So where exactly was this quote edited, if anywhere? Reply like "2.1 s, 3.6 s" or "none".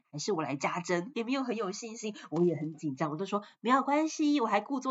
1.1 s